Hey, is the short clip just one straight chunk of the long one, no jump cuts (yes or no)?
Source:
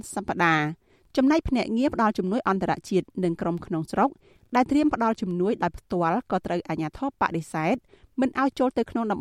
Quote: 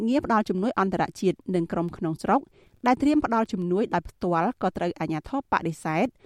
yes